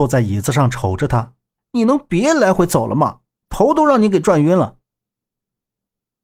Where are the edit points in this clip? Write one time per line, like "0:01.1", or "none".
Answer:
0:01.6